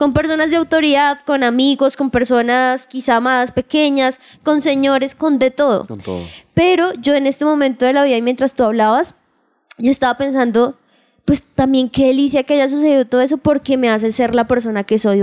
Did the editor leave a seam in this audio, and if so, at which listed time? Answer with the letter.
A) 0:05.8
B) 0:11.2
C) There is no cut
C